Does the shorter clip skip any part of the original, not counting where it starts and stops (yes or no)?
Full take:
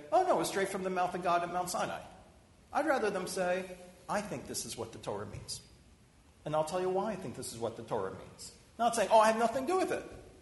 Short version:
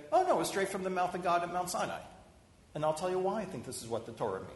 yes